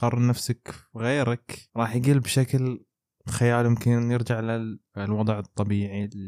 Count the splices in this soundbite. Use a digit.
0